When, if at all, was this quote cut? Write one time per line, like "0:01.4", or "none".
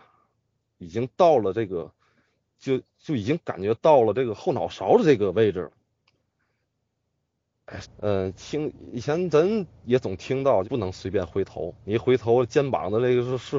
0:07.8
0:10.6
0:11.8